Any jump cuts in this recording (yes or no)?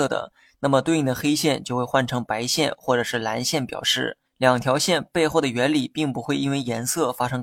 yes